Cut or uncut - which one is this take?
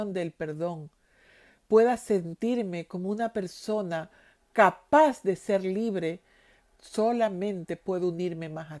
cut